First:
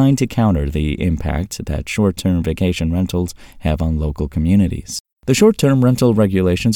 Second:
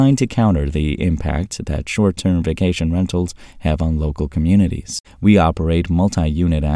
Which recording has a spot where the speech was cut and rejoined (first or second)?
second